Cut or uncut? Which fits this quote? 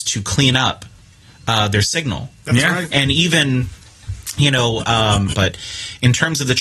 cut